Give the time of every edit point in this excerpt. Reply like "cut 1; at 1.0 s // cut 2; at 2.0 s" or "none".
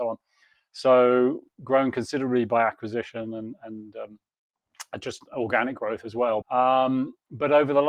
cut 1; at 6.4 s